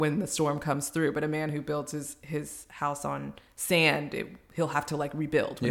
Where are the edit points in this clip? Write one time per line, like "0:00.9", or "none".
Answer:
none

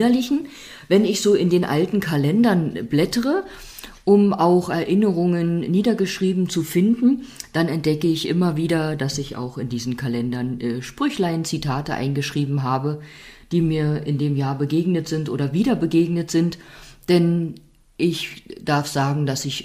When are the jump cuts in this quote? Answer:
none

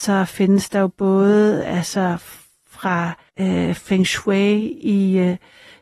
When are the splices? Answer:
0:03.3

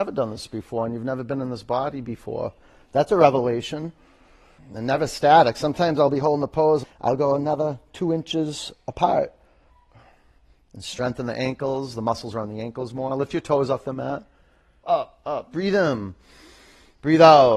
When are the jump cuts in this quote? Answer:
0:04.6
0:06.8
0:14.8

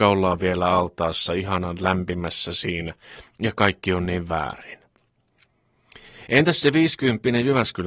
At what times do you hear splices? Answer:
none

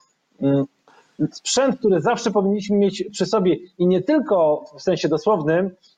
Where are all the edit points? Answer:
0:01.3

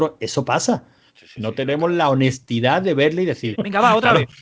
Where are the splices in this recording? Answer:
0:01.1
0:03.5

